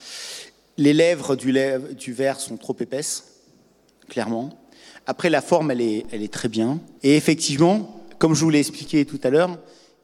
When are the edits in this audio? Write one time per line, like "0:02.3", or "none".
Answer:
0:07.0